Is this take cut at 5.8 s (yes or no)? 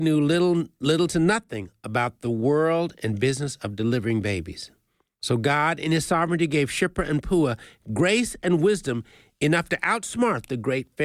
no